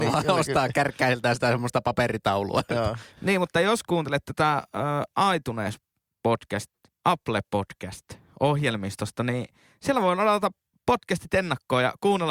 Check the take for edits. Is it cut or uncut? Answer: cut